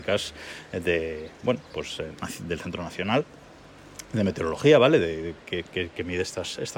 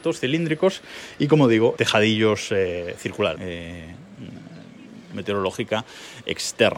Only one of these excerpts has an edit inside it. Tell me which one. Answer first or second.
second